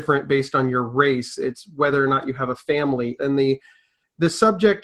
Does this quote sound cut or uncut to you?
cut